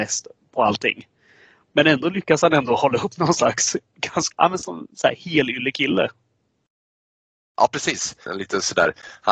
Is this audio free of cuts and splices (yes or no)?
no